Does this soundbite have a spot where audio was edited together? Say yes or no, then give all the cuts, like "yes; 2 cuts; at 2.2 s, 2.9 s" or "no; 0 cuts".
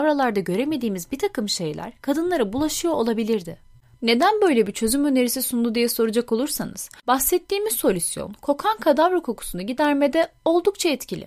yes; 1 cut; at 3.9 s